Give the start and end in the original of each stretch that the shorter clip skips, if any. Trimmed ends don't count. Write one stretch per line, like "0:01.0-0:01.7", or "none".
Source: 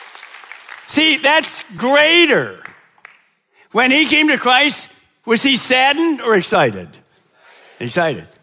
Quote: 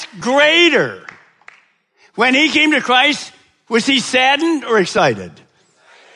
none